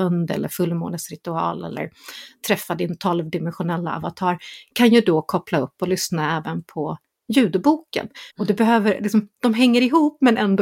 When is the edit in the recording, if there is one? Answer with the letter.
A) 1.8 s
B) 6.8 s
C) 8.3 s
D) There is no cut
C